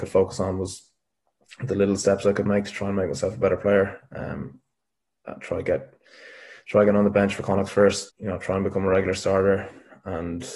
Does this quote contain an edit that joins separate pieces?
yes; 1 cut; at 8.1 s

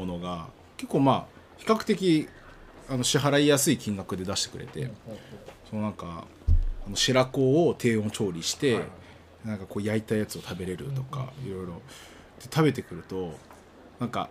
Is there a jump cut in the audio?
no; 0 cuts

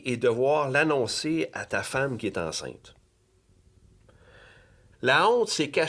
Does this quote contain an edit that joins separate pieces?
yes; 1 cut; at 4.9 s

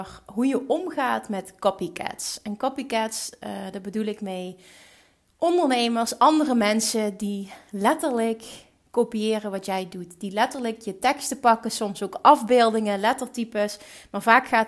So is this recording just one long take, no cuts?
yes; 0 cuts

